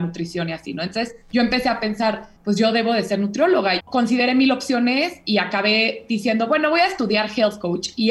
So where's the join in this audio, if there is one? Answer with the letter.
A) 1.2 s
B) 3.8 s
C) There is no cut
B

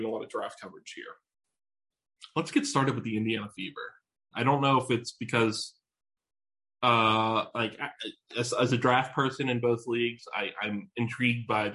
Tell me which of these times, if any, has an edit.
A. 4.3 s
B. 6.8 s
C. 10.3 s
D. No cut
A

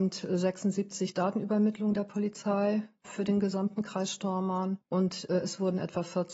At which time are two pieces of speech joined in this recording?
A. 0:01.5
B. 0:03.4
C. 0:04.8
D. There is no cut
C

